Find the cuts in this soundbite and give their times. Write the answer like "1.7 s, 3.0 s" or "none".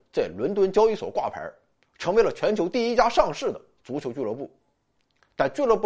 none

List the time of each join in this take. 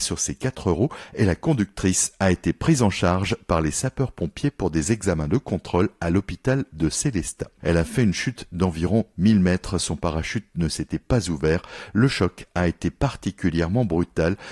7.6 s

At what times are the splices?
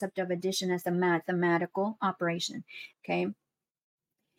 2.9 s

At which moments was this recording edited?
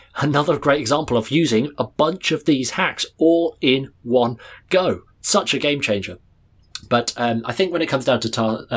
5.1 s

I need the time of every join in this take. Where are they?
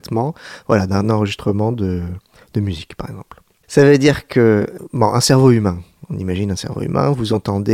none

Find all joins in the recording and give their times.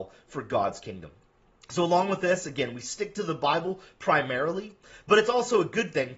none

